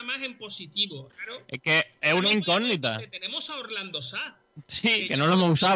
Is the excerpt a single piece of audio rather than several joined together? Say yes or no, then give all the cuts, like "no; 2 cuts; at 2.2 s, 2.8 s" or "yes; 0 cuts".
no; 1 cut; at 1.1 s